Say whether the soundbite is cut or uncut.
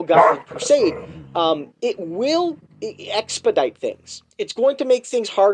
cut